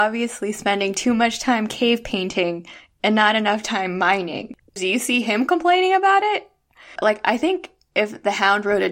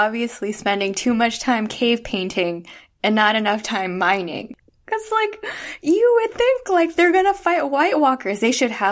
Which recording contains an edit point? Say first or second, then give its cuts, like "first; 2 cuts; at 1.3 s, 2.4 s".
first; 2 cuts; at 4.8 s, 7.0 s